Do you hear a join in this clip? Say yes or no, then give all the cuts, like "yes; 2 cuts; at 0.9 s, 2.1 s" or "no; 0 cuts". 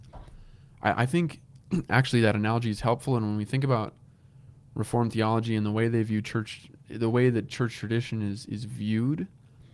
no; 0 cuts